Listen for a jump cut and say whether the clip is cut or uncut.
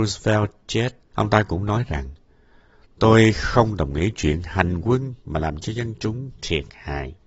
cut